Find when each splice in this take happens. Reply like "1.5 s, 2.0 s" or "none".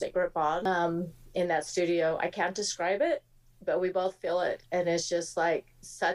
none